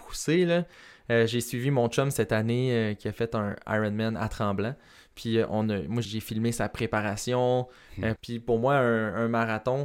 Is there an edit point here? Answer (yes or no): yes